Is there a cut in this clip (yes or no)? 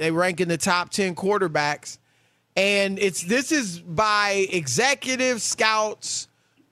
no